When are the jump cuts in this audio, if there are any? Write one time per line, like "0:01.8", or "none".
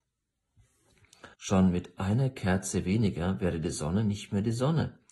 0:01.3